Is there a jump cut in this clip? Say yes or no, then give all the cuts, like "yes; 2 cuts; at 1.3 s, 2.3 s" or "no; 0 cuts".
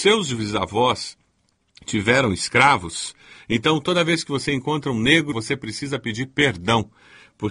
yes; 1 cut; at 5.3 s